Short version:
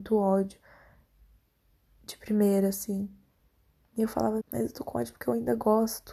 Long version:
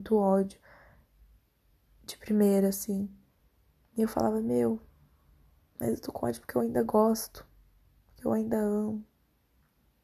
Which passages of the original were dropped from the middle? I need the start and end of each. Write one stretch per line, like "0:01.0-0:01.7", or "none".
0:04.4-0:05.7